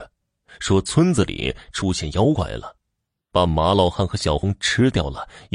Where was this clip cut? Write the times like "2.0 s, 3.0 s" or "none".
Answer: none